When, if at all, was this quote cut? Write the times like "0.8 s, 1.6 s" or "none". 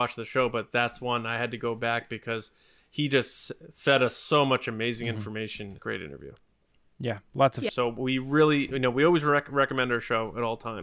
5.8 s, 7.7 s

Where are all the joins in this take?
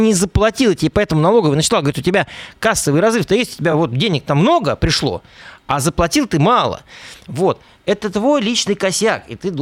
none

